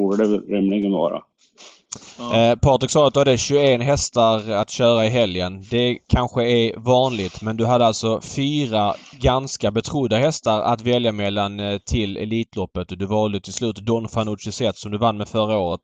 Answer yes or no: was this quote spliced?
no